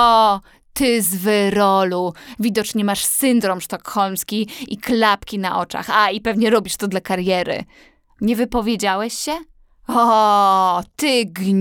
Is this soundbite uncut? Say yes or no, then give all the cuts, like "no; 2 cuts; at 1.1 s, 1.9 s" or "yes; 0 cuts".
yes; 0 cuts